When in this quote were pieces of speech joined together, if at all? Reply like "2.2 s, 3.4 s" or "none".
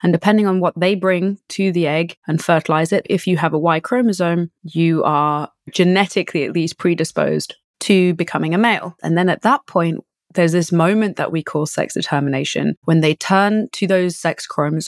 9.0 s